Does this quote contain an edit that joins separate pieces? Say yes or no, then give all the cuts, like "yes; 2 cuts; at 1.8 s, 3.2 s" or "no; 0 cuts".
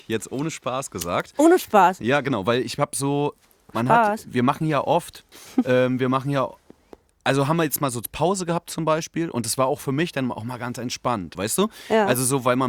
yes; 2 cuts; at 5.3 s, 11.4 s